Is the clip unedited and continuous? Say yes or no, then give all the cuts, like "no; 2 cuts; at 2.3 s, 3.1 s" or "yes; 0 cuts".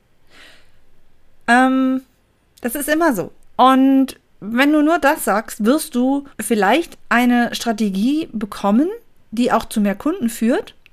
no; 2 cuts; at 3.4 s, 6.3 s